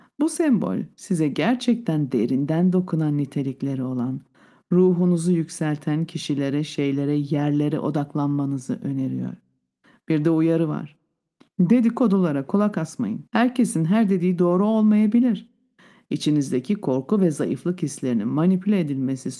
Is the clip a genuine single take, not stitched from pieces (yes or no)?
no